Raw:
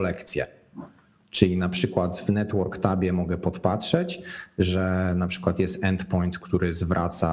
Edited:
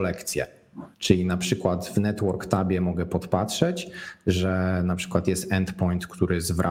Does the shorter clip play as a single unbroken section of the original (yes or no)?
no